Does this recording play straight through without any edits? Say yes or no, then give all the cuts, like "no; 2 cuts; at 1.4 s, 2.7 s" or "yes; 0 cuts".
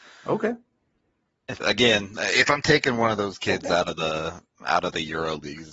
no; 1 cut; at 1.6 s